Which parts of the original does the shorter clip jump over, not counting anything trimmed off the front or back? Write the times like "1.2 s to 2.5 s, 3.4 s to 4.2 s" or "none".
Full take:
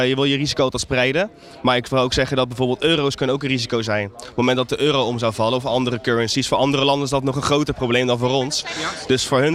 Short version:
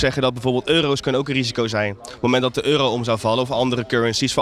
none